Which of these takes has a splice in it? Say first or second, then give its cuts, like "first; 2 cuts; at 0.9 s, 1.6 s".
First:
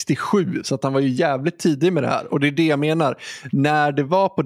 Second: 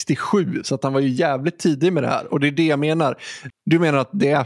second; 1 cut; at 3.5 s